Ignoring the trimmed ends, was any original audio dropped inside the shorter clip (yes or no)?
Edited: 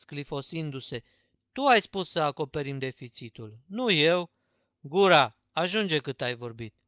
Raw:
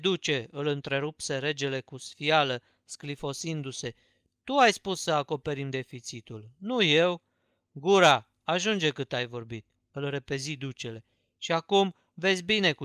no